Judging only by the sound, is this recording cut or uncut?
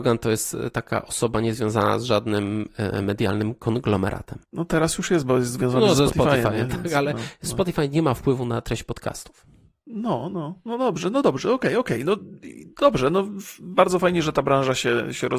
cut